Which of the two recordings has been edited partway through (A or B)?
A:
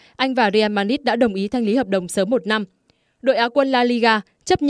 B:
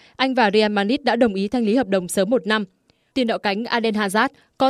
B